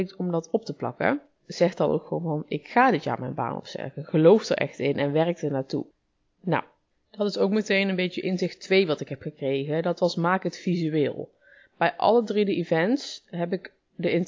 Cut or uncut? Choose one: cut